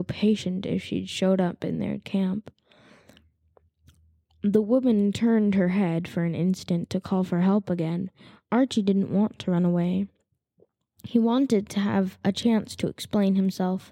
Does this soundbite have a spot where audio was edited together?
no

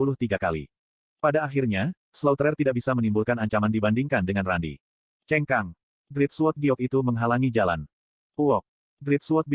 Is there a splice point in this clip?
no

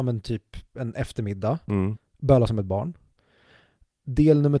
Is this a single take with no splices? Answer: no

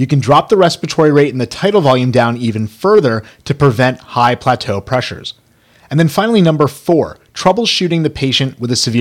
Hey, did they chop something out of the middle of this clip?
no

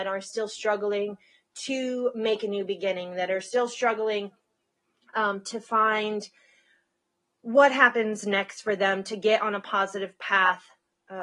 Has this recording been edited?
no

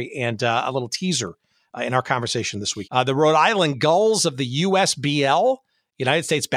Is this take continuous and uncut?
no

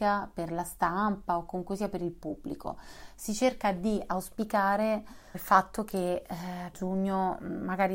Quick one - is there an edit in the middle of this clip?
yes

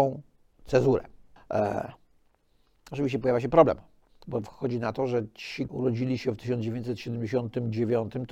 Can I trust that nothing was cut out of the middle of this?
no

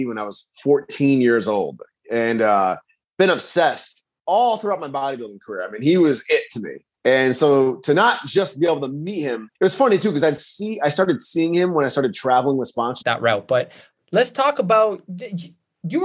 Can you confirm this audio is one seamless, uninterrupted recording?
no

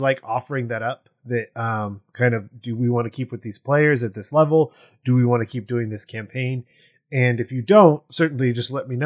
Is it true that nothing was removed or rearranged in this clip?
yes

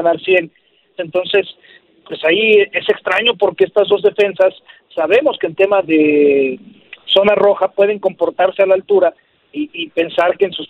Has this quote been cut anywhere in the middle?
yes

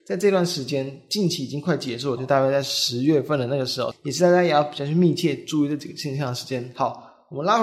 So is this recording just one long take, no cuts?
no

